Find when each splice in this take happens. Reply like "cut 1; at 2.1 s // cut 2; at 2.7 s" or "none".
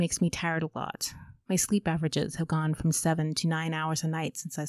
none